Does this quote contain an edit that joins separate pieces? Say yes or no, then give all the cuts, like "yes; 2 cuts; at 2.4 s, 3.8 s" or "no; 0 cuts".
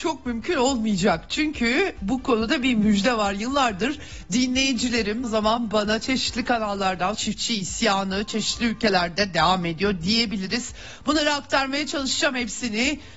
yes; 2 cuts; at 5.2 s, 7.1 s